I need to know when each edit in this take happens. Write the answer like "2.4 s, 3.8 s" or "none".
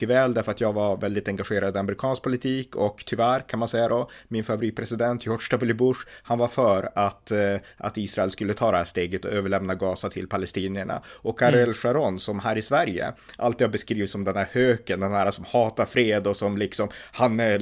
none